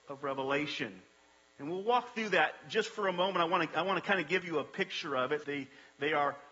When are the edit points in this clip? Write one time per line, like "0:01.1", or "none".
0:05.4